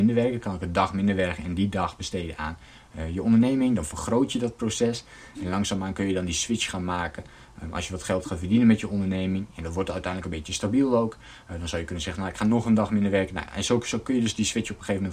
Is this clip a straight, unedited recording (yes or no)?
yes